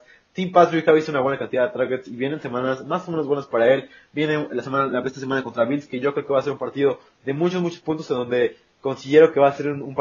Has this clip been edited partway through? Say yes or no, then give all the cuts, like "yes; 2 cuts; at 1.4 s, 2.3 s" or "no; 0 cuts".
no; 0 cuts